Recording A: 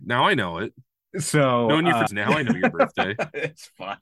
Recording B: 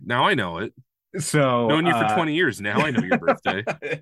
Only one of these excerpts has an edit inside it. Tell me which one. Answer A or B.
A